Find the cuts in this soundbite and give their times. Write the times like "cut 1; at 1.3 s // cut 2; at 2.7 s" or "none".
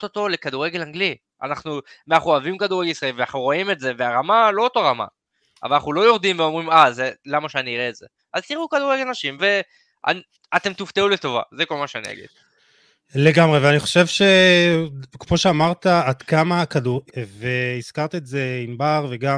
cut 1; at 8.2 s // cut 2; at 9.4 s // cut 3; at 17.1 s